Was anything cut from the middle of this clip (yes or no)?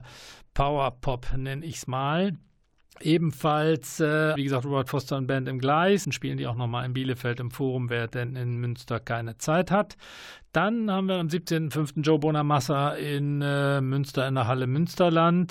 yes